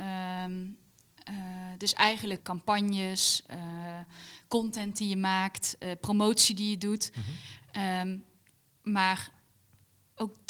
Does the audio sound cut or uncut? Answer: cut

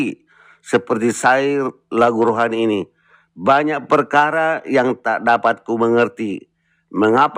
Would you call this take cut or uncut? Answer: uncut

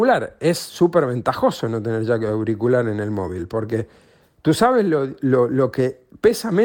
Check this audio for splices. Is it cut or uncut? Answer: uncut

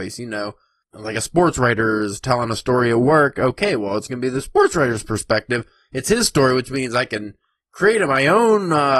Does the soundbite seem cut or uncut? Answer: uncut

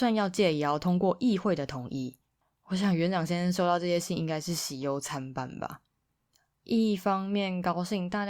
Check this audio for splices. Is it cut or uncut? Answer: uncut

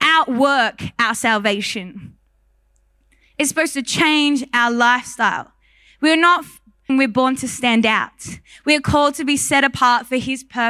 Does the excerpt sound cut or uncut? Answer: cut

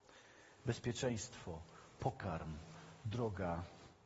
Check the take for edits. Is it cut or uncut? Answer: uncut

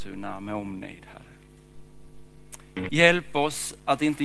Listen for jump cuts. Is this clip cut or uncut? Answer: cut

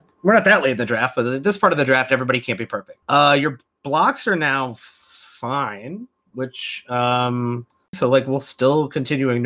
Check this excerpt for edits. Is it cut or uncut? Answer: cut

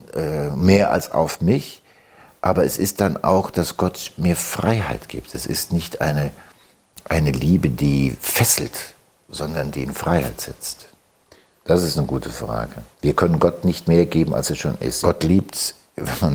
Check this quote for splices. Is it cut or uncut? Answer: cut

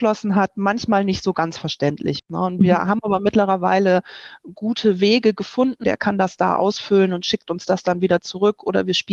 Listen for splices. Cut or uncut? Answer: cut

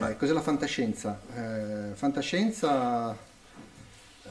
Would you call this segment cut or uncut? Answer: uncut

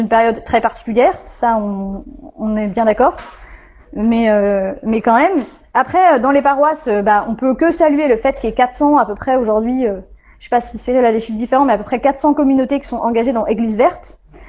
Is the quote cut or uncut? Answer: uncut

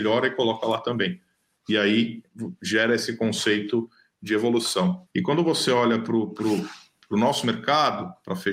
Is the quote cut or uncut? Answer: cut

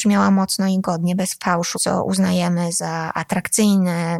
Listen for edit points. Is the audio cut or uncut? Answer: cut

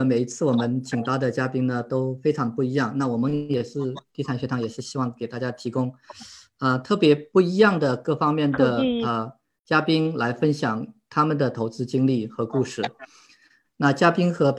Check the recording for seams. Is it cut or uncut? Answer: cut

